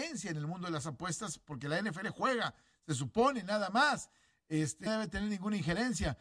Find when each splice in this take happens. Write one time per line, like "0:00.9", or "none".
0:04.9